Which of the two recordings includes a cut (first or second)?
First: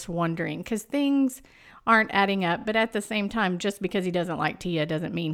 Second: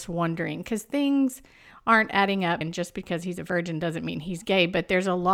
second